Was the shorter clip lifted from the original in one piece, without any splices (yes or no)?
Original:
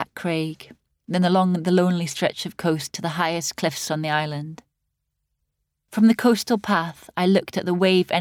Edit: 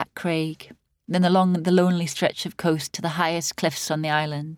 yes